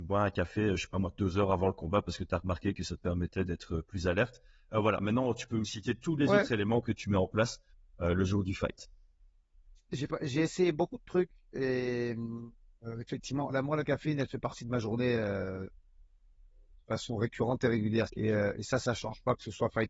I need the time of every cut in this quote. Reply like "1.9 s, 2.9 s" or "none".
13.5 s, 18.1 s